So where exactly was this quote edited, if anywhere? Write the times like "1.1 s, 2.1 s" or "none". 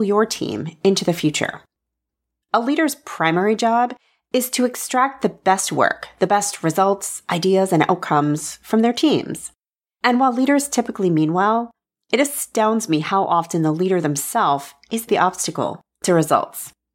2.4 s, 15.1 s